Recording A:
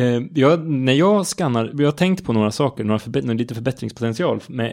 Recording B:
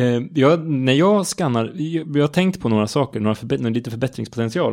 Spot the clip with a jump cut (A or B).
A